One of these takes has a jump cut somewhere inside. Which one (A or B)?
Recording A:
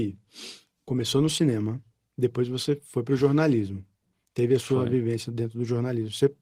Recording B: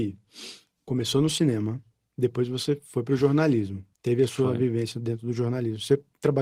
B